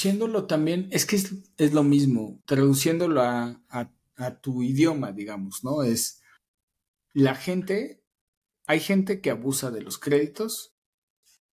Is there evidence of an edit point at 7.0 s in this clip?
no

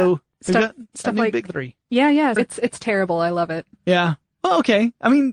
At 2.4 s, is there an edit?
yes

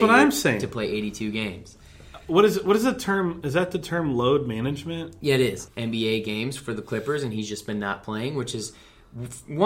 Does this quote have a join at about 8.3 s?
no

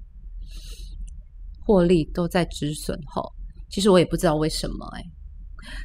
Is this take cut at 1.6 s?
yes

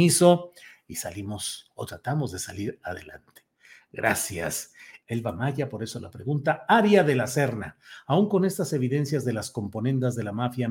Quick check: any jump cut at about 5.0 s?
yes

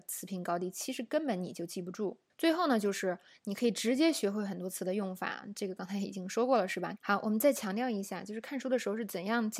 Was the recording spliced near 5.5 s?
no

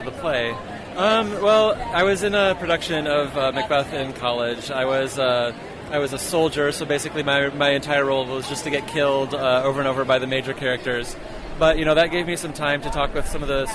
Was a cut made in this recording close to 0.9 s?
yes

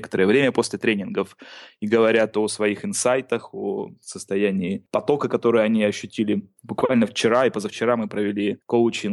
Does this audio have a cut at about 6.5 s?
no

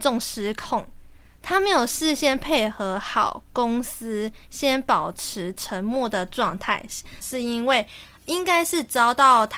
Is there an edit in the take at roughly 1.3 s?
no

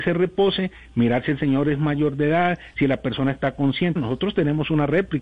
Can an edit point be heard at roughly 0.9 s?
no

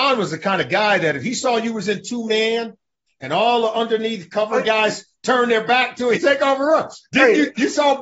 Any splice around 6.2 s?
yes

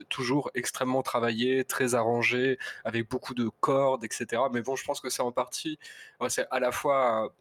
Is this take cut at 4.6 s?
no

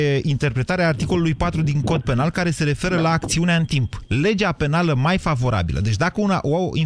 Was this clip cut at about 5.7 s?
no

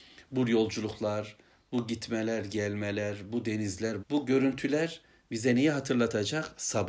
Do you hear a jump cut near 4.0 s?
yes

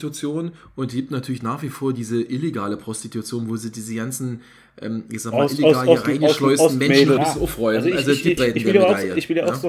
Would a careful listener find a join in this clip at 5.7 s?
no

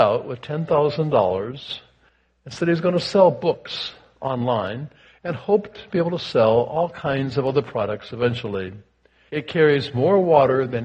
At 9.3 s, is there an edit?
yes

